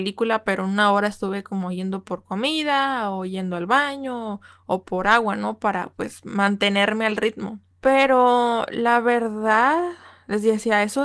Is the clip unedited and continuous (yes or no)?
yes